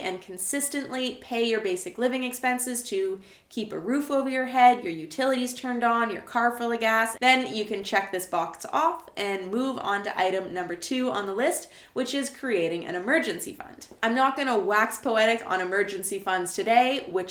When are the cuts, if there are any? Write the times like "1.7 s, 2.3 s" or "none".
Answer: 7.1 s